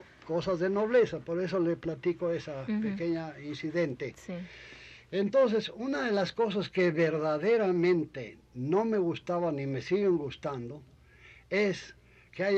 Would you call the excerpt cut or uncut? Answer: uncut